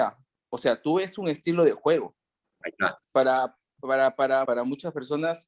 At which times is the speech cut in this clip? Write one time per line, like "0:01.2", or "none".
0:02.6
0:04.5